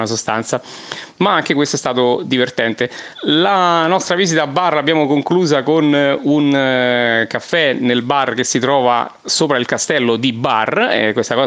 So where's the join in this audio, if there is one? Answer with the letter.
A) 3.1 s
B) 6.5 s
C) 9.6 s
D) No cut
A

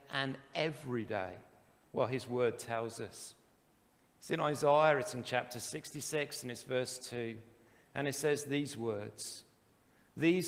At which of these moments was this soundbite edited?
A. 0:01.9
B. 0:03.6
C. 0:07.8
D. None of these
D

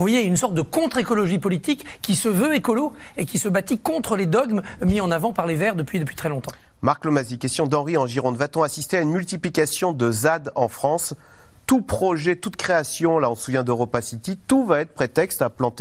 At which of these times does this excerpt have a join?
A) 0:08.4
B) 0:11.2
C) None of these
C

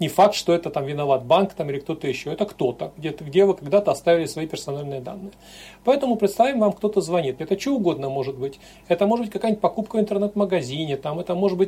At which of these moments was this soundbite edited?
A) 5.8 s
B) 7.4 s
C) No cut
B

